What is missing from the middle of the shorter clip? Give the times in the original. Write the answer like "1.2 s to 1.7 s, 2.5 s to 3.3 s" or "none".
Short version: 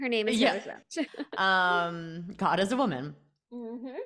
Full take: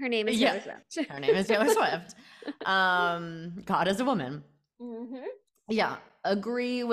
1.1 s to 2.4 s